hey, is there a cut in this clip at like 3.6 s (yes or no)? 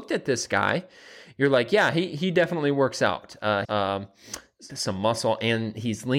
yes